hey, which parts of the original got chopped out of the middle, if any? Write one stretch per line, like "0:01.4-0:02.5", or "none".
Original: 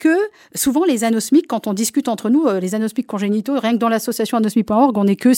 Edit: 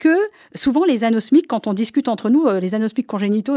none